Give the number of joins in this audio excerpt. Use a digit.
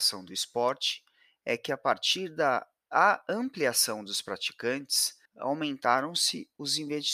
1